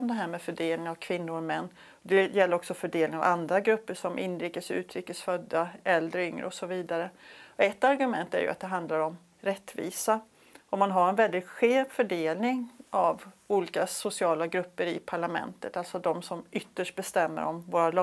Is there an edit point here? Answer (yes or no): no